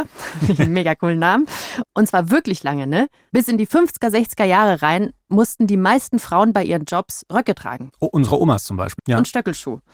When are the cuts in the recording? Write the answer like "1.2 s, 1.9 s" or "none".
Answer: 1.8 s, 9.0 s